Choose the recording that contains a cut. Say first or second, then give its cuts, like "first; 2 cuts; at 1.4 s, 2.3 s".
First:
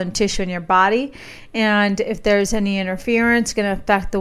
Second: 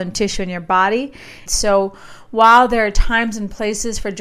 second; 1 cut; at 1.5 s